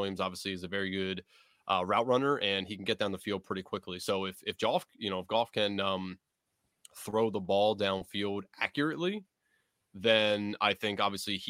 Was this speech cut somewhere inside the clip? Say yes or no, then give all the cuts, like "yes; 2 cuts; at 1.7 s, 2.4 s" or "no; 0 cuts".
no; 0 cuts